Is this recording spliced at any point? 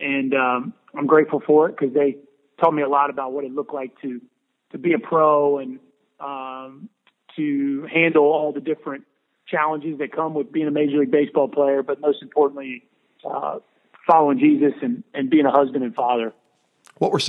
no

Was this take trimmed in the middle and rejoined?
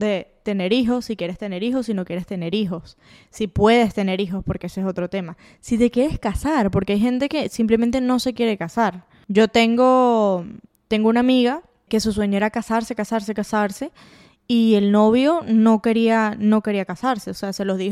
no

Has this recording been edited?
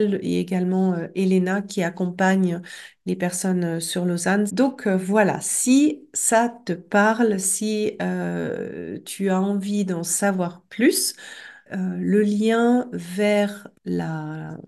yes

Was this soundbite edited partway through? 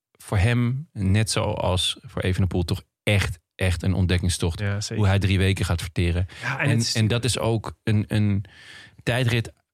no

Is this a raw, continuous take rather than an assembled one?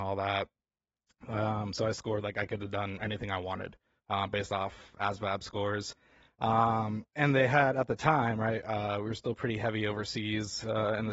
yes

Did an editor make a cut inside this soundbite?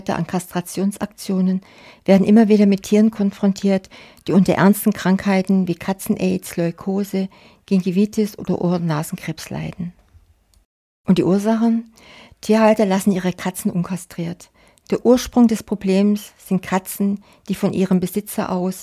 no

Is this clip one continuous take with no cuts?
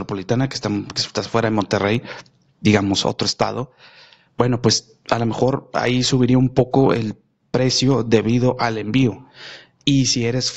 yes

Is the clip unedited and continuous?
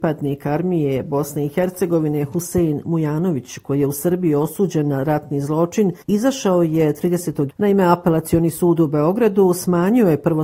no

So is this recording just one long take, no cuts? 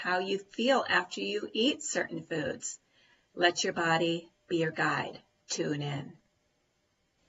no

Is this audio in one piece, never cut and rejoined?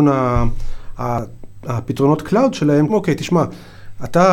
no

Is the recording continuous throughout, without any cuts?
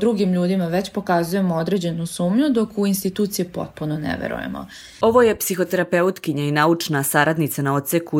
no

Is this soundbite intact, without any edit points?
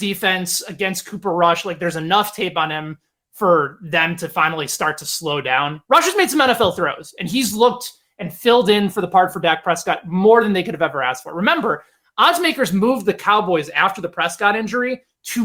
yes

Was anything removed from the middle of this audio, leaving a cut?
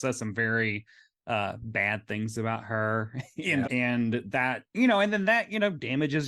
yes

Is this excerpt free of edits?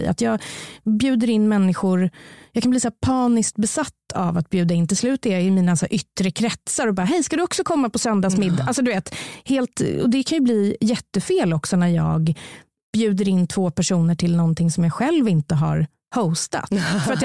yes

